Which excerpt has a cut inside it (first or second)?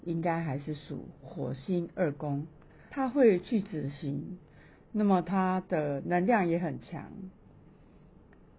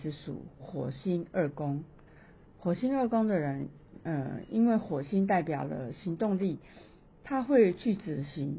first